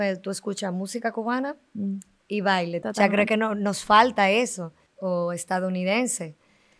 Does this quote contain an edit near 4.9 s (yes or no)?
yes